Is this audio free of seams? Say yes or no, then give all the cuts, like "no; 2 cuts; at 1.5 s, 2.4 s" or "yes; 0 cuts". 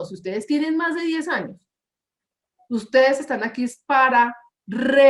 yes; 0 cuts